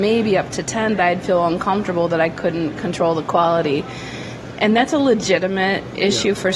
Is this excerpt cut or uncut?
cut